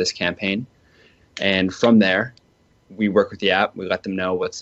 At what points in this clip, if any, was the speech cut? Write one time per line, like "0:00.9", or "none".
none

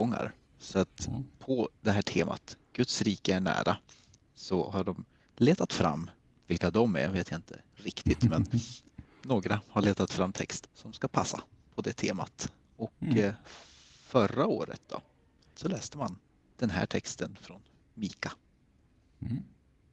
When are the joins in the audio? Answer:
0:10.6
0:15.5

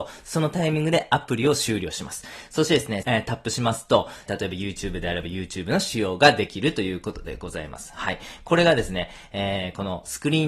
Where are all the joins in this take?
0:03.0
0:04.3

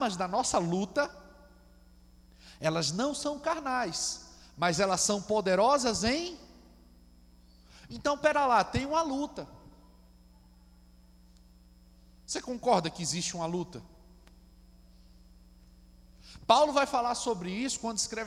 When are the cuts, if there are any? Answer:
none

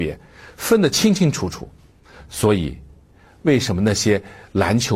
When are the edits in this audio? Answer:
none

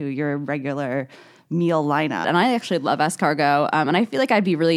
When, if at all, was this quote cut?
0:02.2

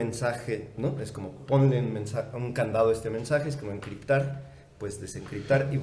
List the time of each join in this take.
none

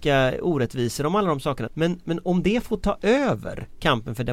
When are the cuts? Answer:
0:01.7

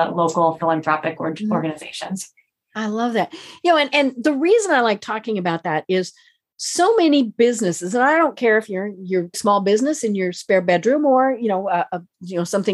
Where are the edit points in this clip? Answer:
0:09.3

